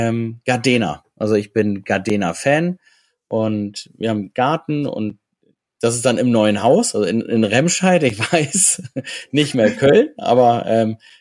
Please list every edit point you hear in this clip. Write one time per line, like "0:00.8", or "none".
none